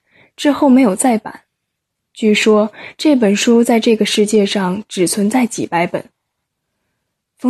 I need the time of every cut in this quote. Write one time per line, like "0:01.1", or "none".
none

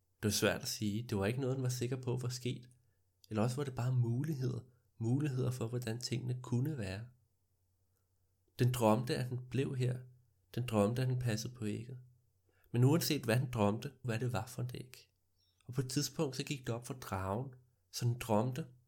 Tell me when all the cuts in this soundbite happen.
0:14.0
0:15.6
0:17.8

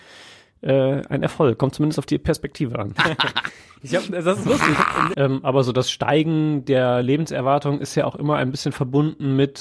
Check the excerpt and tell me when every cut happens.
0:03.0
0:05.1

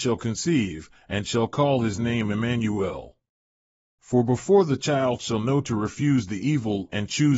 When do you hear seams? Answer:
0:01.1
0:04.0

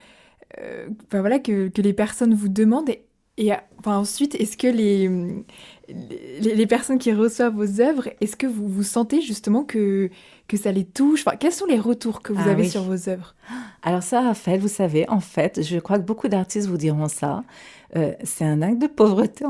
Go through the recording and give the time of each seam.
none

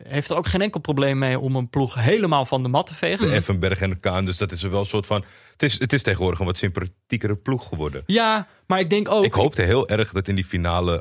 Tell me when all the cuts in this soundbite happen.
0:03.2

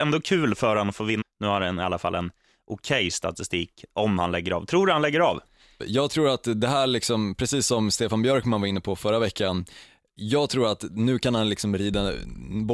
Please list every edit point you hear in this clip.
0:01.2
0:05.8

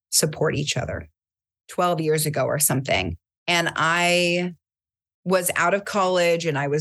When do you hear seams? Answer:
0:01.6

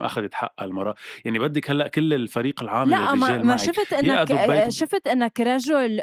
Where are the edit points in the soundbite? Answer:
none

